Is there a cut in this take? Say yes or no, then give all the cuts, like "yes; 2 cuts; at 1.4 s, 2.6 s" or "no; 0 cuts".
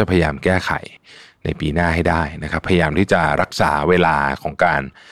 no; 0 cuts